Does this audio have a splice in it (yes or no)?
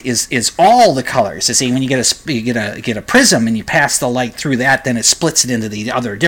no